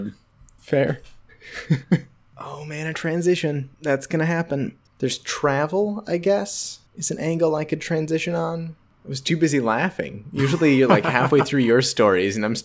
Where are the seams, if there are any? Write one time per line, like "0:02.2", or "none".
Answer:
0:04.9